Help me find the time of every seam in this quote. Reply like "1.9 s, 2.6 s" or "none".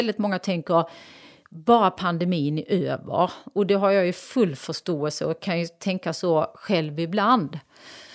none